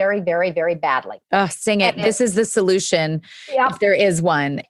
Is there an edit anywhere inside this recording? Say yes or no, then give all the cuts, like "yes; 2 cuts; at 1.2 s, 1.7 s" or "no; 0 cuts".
no; 0 cuts